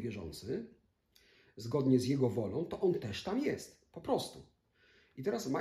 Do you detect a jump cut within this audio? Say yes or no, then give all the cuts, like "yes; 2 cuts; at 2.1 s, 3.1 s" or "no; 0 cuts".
no; 0 cuts